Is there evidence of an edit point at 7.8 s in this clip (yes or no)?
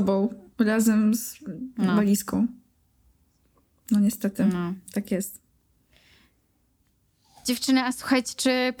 no